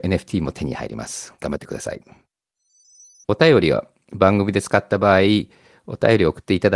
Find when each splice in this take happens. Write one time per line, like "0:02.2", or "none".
0:03.2